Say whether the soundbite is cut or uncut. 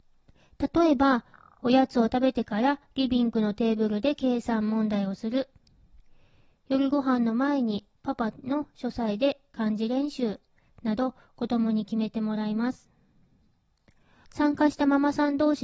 cut